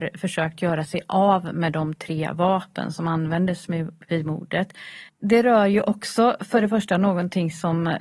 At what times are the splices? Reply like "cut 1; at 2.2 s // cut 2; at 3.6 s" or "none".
cut 1; at 5.1 s